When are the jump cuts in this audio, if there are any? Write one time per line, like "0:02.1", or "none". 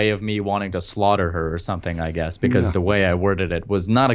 none